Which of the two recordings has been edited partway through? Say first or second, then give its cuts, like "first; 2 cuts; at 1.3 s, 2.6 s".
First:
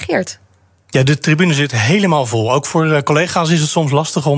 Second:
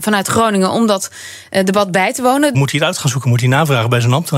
second; 1 cut; at 2.5 s